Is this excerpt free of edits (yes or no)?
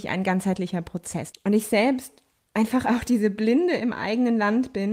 no